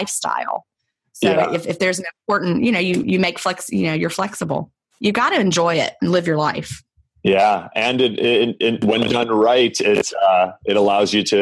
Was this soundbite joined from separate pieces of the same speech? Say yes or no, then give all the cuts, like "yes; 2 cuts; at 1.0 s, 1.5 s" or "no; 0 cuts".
no; 0 cuts